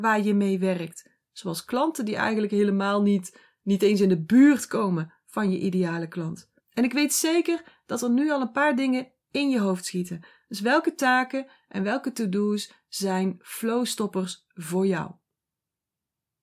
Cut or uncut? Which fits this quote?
cut